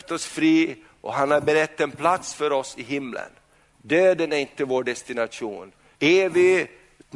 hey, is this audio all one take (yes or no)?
no